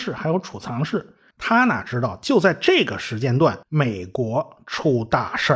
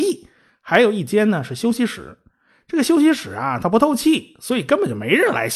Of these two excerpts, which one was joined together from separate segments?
first; 2 cuts; at 1.3 s, 3.6 s

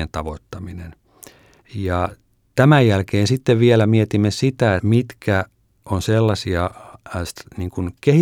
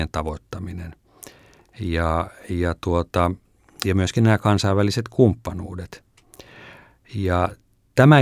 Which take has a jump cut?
first; 2 cuts; at 1.6 s, 4.8 s

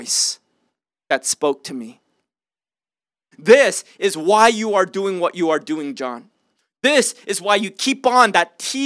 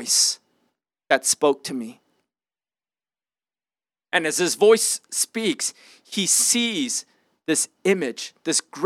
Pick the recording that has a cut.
first; 1 cut; at 3.3 s

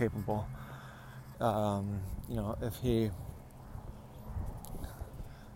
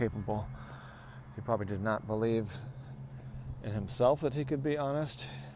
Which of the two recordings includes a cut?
first; 1 cut; at 1.3 s

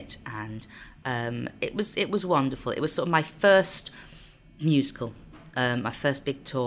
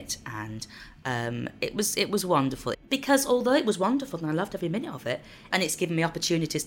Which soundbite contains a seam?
second; 2 cuts; at 2.7 s, 5.5 s

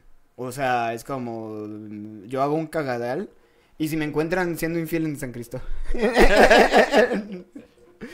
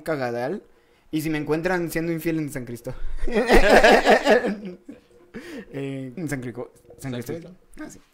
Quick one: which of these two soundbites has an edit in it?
second; 1 cut; at 6.2 s

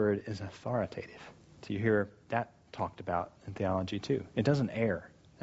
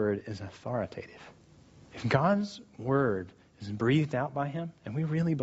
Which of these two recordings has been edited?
first; 1 cut; at 1.6 s

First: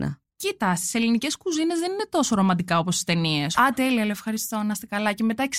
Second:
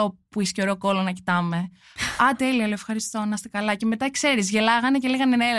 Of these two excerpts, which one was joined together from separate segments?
first; 1 cut; at 3.5 s

